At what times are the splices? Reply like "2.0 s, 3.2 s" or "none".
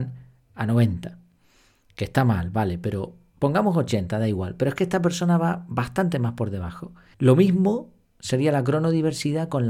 3.3 s, 7.1 s